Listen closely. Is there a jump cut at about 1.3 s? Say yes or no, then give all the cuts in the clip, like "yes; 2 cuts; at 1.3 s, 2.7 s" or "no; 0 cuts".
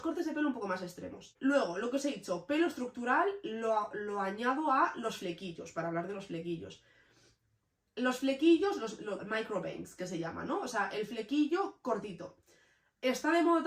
no; 1 cut; at 9.2 s